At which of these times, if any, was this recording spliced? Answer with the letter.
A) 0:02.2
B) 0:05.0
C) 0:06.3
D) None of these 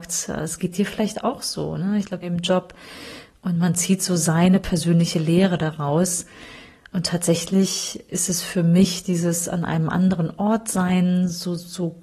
A